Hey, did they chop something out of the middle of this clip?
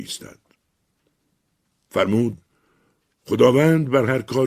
no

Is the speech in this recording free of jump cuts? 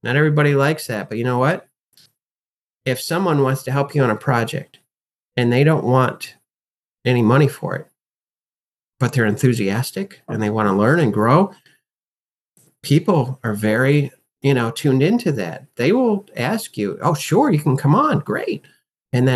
yes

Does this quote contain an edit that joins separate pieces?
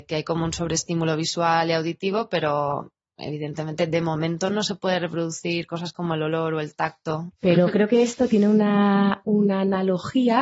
yes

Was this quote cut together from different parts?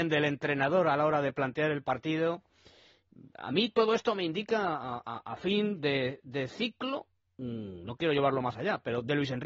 no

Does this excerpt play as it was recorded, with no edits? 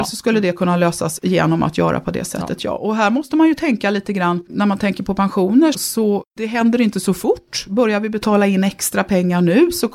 no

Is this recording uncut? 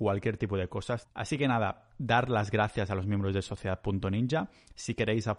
no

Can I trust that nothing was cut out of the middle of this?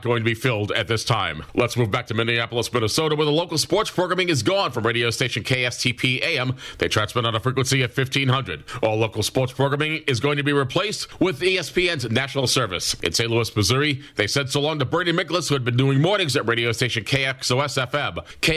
yes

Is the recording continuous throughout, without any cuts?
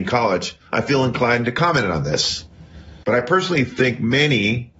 no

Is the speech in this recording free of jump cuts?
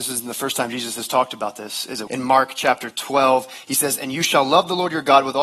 no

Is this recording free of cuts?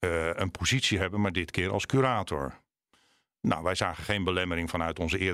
yes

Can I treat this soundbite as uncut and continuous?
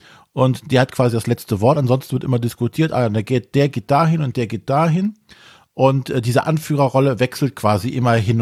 yes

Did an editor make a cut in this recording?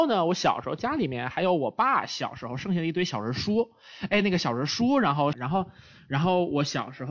yes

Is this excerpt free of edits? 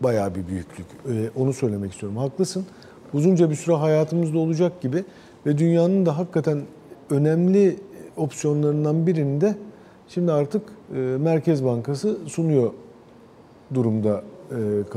yes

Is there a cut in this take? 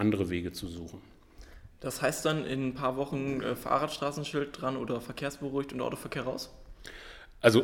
no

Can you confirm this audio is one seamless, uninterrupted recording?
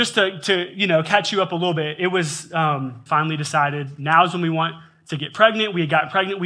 no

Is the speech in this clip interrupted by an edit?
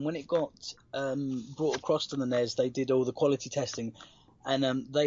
no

